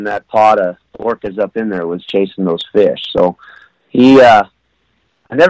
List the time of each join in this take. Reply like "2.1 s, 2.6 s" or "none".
none

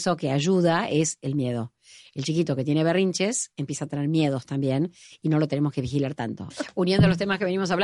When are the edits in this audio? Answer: 6.5 s

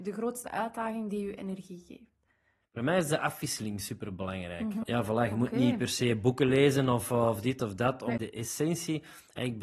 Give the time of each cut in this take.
4.8 s, 8.2 s

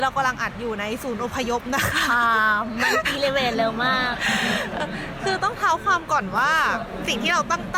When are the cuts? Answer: 4.8 s

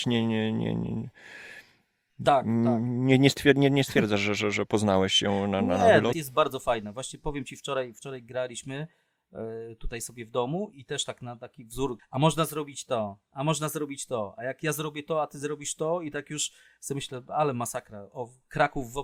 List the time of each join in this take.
6.1 s, 10.7 s, 12.0 s

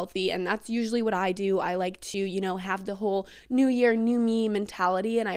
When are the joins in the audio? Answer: none

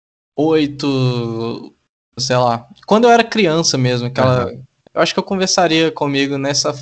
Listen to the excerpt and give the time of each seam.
2.2 s, 4.9 s

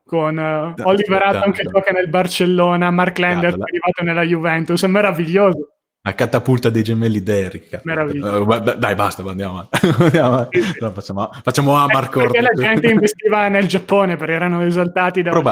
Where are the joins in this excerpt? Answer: none

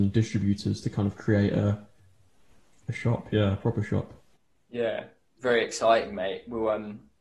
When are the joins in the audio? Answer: 5.4 s

